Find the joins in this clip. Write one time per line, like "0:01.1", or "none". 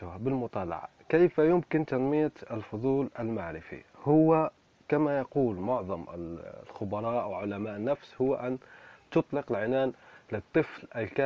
none